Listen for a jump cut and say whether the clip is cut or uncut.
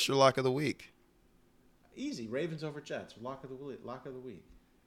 uncut